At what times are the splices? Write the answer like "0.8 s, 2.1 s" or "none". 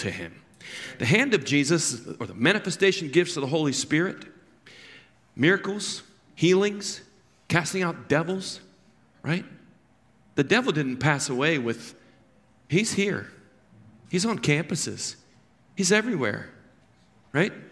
none